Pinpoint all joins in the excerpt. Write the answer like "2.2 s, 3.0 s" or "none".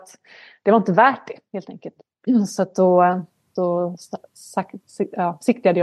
none